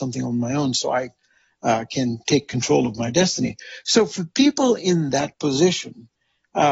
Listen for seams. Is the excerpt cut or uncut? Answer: uncut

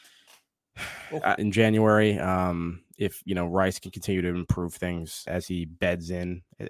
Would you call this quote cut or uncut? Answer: cut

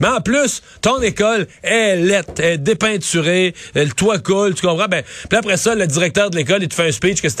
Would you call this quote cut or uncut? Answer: uncut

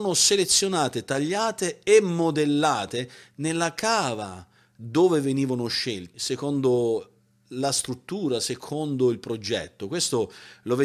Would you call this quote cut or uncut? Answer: cut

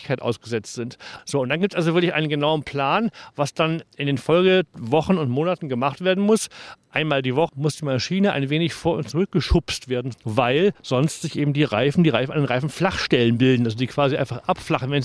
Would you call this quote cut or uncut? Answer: cut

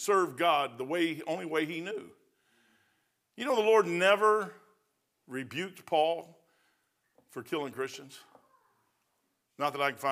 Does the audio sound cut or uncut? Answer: uncut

